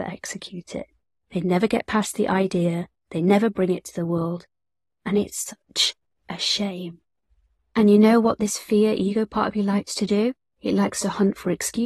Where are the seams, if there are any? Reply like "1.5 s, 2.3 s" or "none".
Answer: none